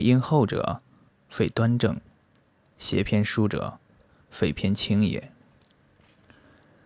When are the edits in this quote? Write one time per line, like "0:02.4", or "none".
none